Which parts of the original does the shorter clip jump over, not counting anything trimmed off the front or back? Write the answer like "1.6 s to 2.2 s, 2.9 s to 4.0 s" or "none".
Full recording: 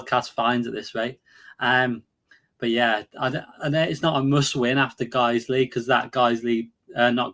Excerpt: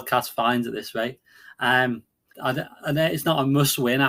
2.3 s to 3.1 s